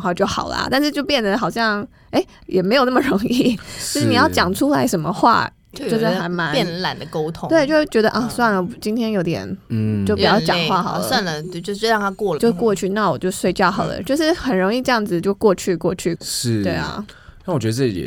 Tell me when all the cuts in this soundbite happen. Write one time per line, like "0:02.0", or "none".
0:12.4
0:16.2